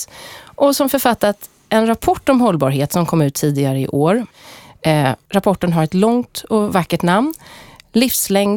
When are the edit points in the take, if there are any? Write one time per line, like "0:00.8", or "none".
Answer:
none